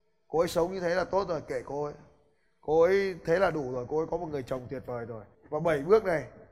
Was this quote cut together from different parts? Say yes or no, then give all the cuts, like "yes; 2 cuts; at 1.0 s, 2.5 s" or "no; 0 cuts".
yes; 1 cut; at 5.3 s